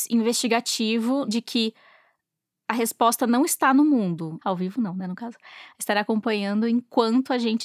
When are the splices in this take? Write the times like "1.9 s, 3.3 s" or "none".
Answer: 1.2 s, 4.4 s